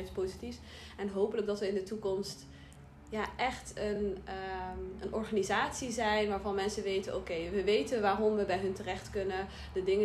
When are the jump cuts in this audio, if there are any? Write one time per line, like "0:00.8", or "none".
none